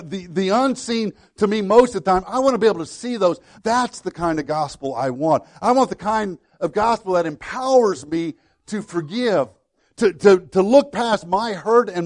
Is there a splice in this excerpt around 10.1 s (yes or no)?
no